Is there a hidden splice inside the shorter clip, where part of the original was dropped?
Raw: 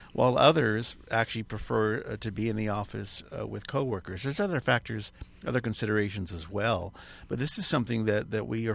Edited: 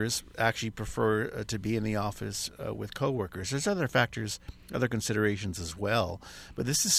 no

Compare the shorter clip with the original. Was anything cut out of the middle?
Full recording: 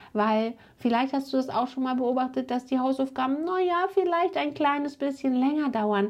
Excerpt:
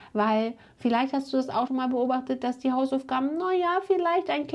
yes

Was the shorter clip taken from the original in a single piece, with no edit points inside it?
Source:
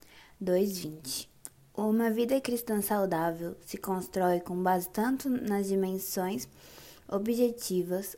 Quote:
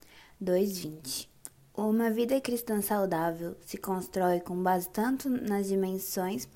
yes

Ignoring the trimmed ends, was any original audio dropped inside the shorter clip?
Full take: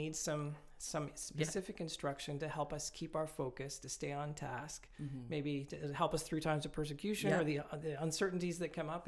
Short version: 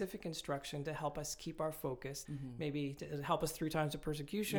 yes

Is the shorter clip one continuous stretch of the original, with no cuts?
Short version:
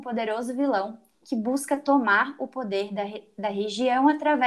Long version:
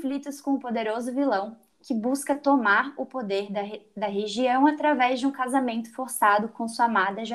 yes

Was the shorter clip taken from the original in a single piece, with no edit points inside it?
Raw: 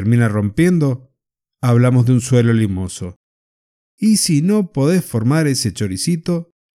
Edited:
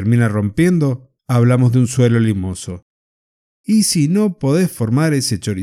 no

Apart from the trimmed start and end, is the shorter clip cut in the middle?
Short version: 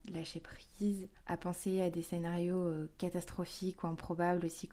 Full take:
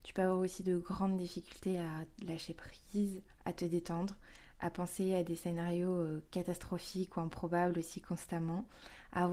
yes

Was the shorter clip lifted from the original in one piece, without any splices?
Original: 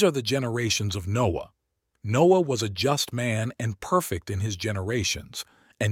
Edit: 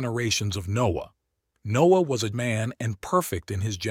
no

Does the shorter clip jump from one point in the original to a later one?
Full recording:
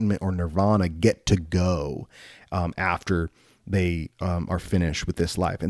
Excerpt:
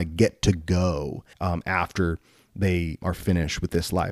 yes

